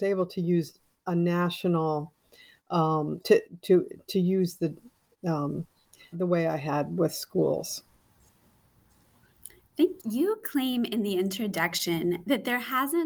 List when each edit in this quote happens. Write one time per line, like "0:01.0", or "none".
0:03.2
0:06.1
0:10.0